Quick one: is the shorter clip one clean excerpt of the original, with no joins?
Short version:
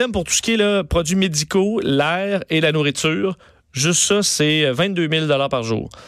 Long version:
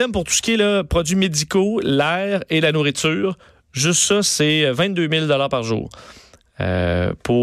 yes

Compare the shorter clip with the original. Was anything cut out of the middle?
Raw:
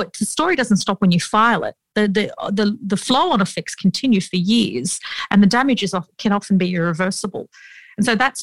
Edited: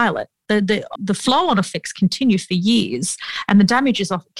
yes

